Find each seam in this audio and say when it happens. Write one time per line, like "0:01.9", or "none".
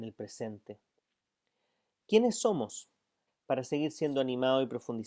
0:03.3